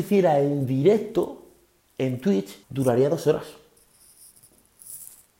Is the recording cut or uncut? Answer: cut